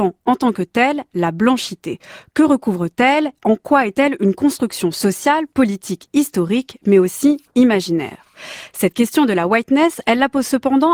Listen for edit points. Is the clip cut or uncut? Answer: uncut